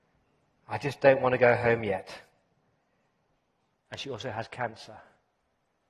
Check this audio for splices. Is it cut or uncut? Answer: cut